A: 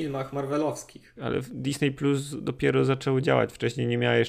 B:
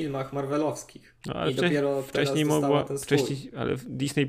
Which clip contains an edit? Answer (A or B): A